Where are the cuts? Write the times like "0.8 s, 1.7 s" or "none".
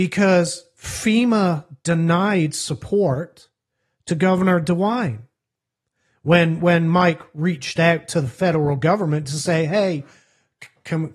none